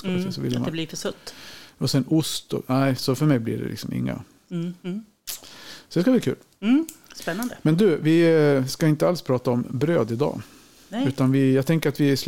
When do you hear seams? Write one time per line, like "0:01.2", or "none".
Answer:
0:04.8